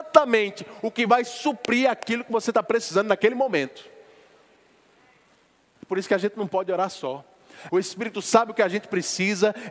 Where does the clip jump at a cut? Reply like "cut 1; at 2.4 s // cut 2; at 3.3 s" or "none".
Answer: cut 1; at 7.7 s